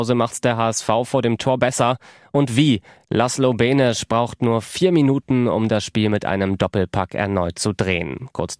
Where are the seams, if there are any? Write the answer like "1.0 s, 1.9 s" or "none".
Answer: none

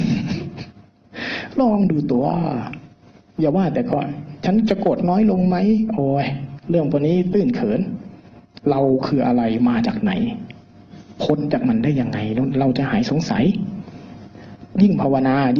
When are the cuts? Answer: 8.6 s

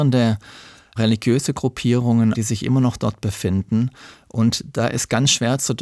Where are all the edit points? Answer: 2.3 s

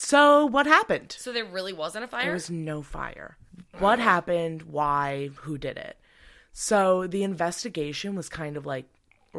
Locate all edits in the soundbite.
none

